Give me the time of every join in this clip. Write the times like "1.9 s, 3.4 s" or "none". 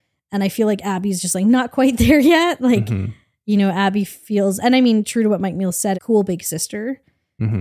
5.9 s

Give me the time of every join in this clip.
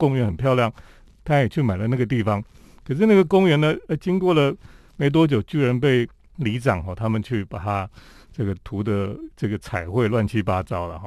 none

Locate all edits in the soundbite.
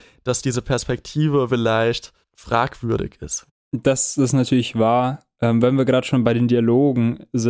none

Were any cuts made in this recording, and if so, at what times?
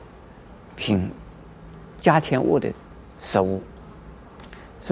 none

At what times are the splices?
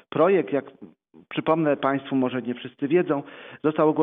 none

